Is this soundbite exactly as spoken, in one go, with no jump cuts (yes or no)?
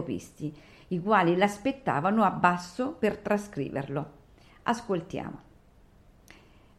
no